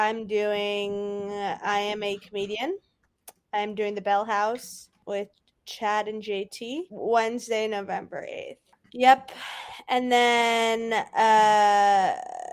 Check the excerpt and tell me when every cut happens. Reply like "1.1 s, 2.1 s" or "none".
8.8 s